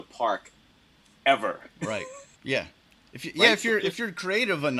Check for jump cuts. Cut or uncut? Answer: cut